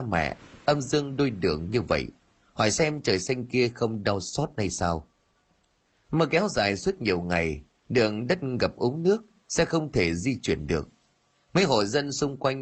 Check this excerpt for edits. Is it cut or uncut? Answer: uncut